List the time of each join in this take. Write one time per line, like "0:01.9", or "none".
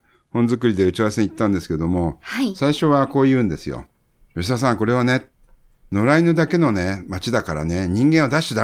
none

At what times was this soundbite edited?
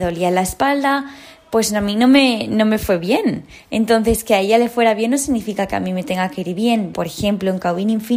0:06.9

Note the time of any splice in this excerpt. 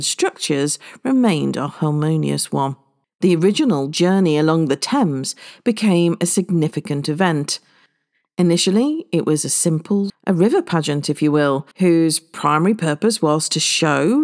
0:03.0
0:10.1
0:11.7

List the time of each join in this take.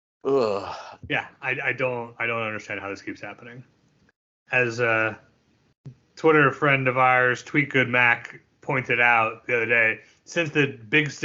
0:01.0

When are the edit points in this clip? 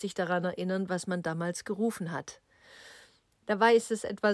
0:02.4

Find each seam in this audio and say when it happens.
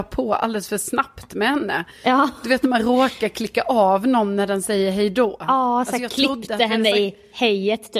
none

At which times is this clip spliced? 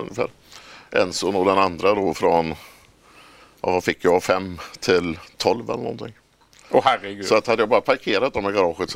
none

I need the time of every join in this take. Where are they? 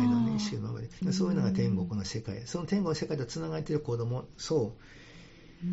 0:01.0

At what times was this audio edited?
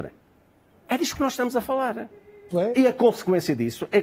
0:02.5

